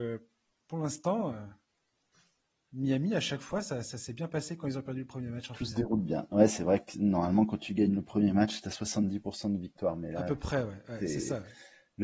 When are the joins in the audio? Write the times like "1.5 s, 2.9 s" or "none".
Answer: none